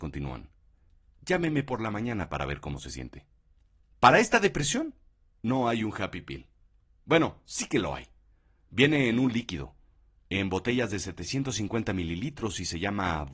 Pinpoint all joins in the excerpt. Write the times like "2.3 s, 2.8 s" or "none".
3.9 s